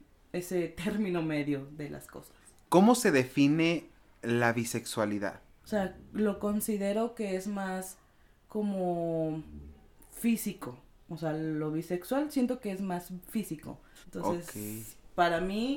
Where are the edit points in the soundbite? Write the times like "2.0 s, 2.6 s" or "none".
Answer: 5.6 s, 14.0 s